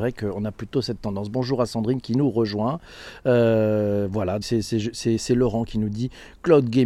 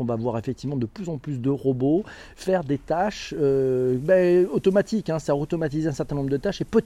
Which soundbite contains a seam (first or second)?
first